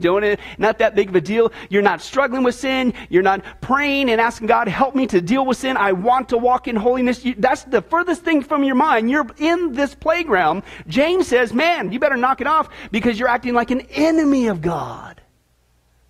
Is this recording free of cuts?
yes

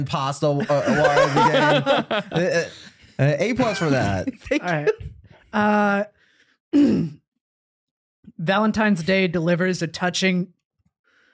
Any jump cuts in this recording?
no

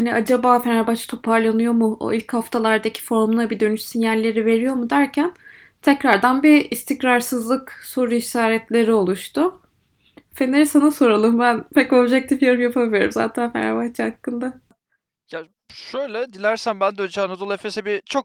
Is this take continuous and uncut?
yes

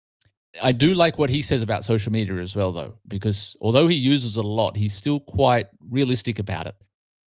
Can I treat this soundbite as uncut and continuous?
yes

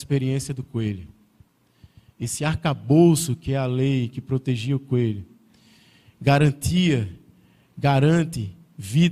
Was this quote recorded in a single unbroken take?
yes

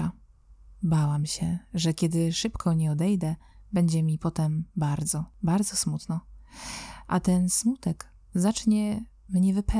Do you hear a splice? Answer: no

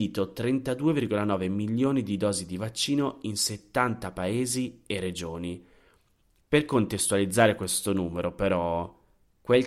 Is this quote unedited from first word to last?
no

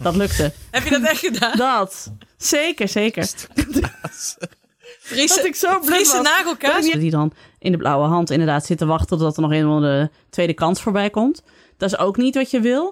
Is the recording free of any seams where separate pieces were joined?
no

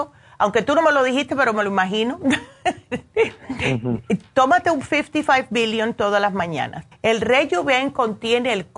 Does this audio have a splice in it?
yes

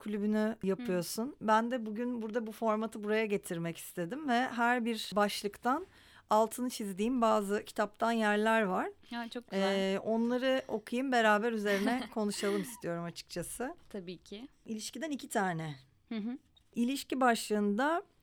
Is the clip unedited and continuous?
yes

